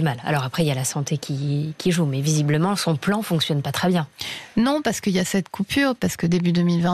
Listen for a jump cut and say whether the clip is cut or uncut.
uncut